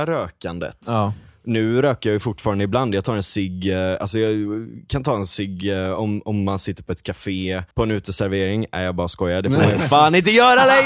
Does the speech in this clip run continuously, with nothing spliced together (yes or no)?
no